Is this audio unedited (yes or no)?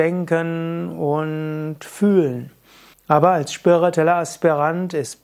no